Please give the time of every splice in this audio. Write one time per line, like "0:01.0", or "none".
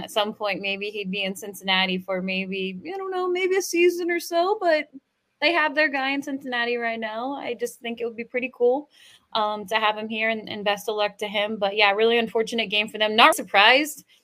0:13.3